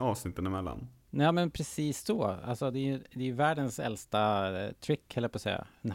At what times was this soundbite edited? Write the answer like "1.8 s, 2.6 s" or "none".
1.1 s